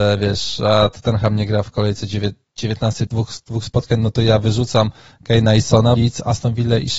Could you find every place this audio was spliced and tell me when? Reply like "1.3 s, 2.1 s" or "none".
3.1 s, 6.0 s